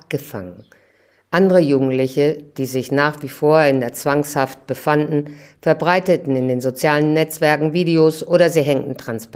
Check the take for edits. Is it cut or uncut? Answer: uncut